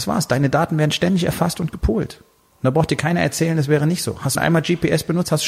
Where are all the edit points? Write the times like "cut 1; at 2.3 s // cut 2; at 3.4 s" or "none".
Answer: cut 1; at 4.3 s